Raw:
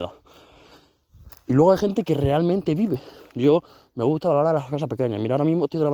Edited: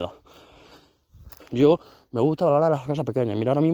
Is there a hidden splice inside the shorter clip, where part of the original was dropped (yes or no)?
yes